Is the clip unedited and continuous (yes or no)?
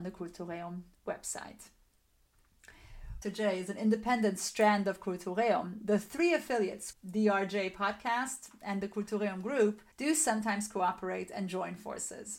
no